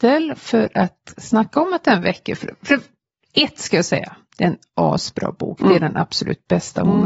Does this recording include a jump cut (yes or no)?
no